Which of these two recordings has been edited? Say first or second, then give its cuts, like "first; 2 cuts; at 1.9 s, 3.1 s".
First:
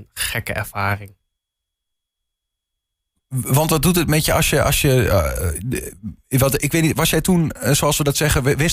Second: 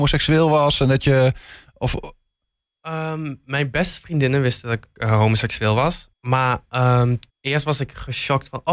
second; 2 cuts; at 6.1 s, 7.3 s